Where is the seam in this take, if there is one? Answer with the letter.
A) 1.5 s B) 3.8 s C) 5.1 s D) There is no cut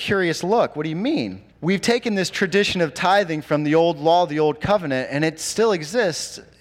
A